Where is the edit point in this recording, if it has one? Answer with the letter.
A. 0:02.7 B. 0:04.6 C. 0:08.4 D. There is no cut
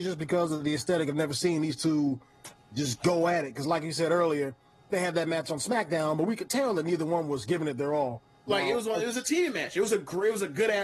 C